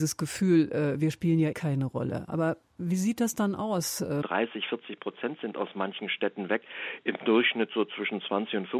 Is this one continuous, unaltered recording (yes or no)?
no